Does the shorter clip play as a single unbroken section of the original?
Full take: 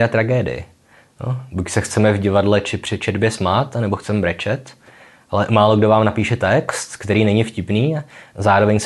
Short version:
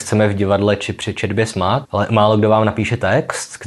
no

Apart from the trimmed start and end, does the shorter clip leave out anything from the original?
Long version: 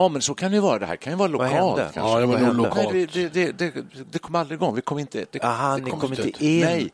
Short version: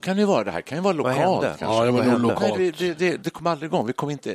yes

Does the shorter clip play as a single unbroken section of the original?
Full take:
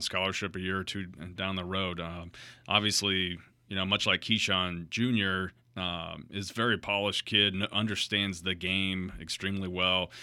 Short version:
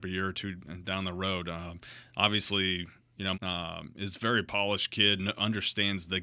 no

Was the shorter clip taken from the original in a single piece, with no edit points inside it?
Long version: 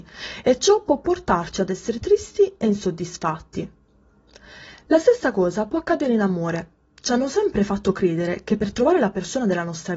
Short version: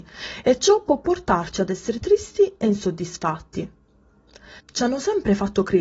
no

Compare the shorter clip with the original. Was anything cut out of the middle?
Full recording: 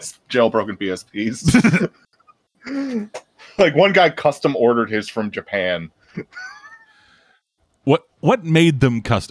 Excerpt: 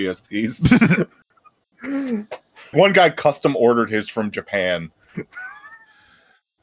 yes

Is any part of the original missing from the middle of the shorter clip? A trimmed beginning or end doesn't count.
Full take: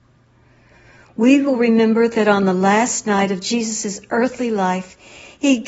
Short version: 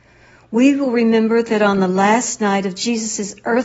no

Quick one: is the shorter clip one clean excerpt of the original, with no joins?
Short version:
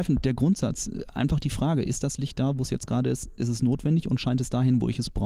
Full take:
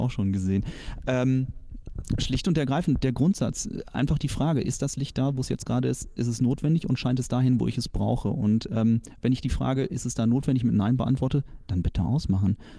yes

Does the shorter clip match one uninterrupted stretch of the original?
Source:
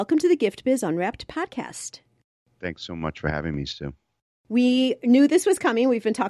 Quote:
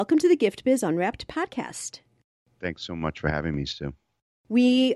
yes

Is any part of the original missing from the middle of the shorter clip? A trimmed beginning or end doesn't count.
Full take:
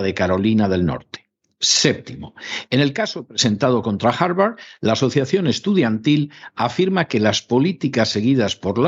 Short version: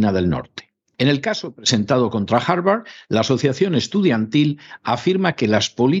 yes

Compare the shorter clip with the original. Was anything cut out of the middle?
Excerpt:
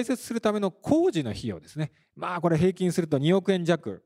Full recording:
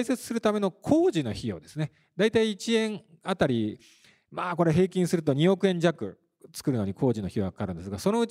yes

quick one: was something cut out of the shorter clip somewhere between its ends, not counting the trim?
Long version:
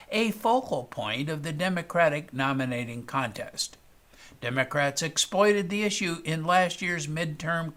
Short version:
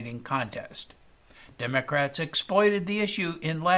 no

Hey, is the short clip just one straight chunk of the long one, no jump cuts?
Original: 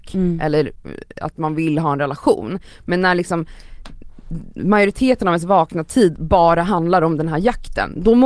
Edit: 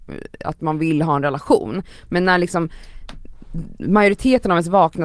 yes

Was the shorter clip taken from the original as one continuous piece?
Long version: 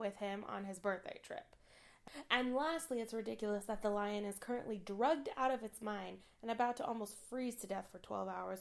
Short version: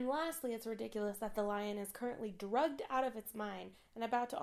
yes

